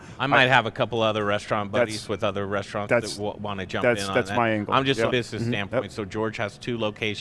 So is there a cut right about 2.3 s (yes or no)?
no